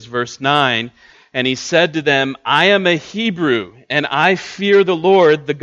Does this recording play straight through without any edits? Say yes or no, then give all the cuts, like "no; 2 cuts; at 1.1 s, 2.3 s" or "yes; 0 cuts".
yes; 0 cuts